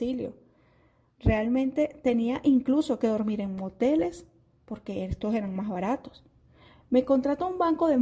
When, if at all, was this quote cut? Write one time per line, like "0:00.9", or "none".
none